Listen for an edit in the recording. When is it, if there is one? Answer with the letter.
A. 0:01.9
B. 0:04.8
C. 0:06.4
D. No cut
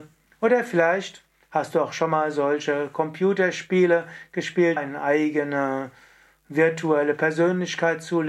B